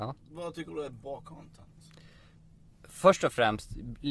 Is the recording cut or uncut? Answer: uncut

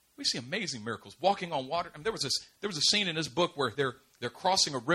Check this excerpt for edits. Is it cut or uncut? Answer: uncut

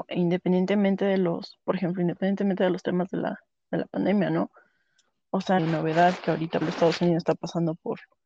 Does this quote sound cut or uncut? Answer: cut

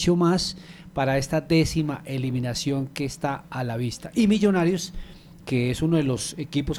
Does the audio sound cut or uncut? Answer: uncut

